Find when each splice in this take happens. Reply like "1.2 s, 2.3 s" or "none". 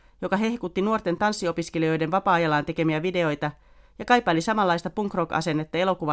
none